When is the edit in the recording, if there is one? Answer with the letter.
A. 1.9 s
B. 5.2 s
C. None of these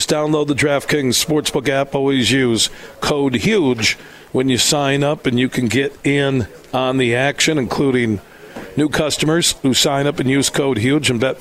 C